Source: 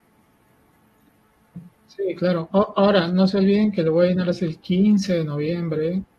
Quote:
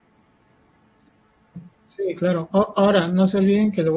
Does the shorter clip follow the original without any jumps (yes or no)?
yes